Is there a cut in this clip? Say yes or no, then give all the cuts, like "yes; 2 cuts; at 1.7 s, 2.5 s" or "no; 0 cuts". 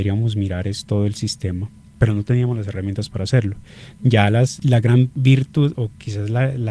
yes; 1 cut; at 4.0 s